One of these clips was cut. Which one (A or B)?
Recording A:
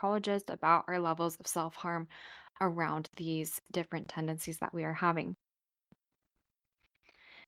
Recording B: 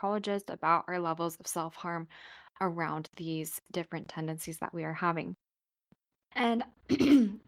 B